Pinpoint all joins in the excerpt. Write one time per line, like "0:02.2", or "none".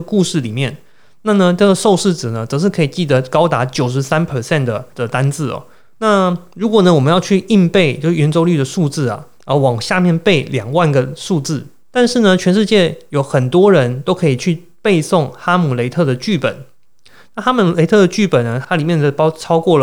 0:05.9
0:11.8
0:18.6

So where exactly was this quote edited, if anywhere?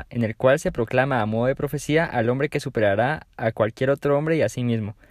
none

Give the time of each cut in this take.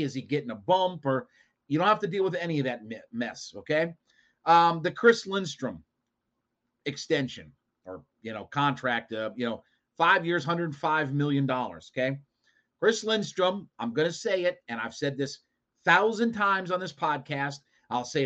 none

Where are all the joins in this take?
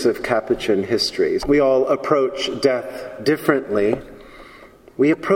0:01.4

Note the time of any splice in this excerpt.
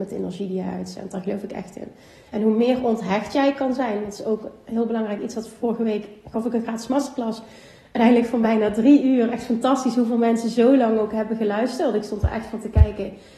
none

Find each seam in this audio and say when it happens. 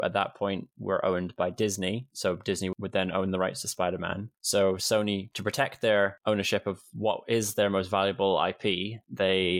none

